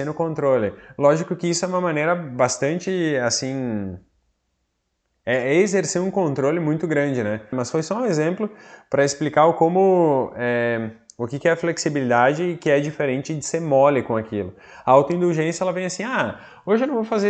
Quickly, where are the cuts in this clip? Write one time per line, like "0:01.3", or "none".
0:07.5